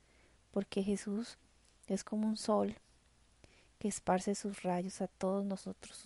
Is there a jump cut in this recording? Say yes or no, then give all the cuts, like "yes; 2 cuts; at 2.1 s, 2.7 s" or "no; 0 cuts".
no; 0 cuts